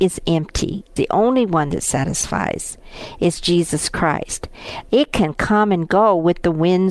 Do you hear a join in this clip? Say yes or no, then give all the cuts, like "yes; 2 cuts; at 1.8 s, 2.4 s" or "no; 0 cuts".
yes; 2 cuts; at 1.0 s, 4.9 s